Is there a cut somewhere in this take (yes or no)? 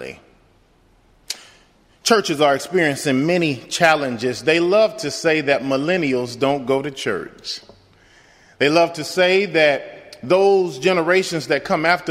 no